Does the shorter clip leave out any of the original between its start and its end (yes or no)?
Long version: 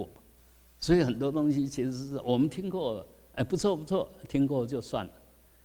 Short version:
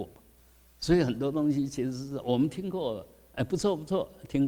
no